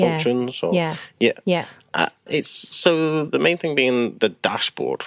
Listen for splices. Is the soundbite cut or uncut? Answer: cut